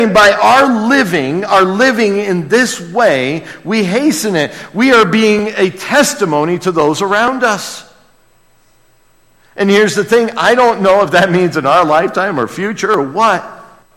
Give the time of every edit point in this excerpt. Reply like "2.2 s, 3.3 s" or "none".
none